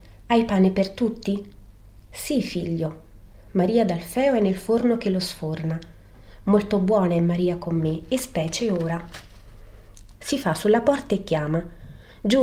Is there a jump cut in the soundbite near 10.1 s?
yes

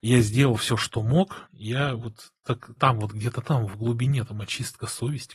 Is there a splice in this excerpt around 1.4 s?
yes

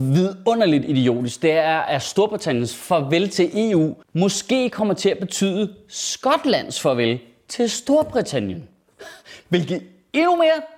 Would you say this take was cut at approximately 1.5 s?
no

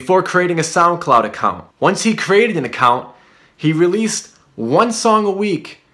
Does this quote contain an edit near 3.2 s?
no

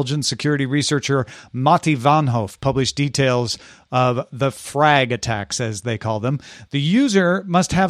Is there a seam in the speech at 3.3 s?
no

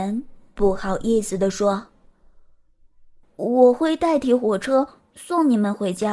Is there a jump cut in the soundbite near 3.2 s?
yes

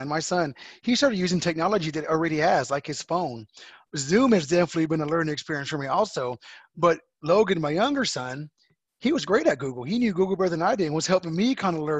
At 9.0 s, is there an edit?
no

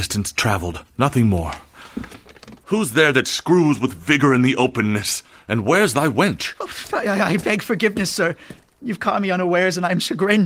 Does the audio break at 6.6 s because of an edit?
no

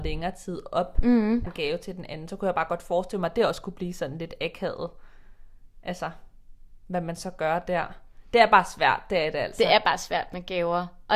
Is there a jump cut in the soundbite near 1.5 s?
yes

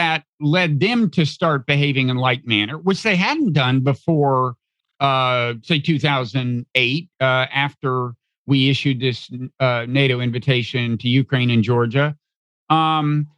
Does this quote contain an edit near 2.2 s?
no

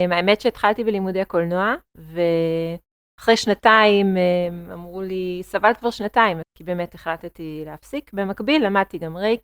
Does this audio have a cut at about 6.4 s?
yes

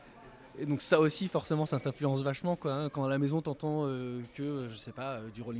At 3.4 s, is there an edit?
no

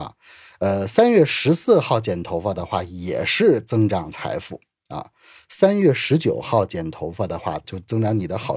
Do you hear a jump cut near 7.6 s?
yes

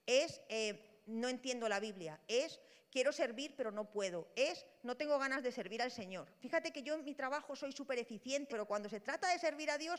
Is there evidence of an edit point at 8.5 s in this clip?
yes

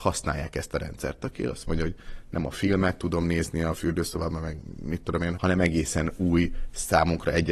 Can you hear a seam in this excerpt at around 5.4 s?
yes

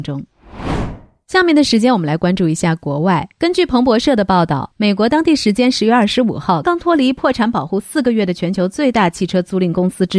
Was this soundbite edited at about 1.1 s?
no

